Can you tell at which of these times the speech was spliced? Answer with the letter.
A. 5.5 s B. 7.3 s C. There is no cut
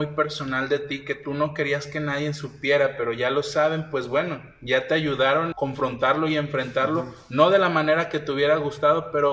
A